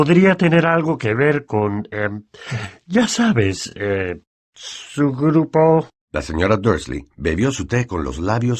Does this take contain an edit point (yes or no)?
no